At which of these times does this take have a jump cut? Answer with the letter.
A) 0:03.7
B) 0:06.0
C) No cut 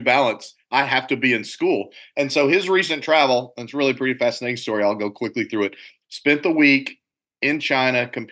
B